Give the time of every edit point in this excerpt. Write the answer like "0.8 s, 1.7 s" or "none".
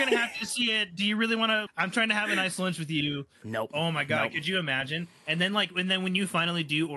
1.7 s, 3.4 s